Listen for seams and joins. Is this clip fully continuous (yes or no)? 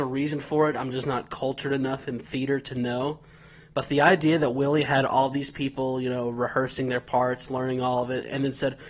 yes